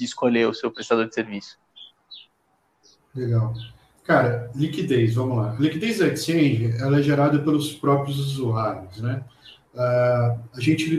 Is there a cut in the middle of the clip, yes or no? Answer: no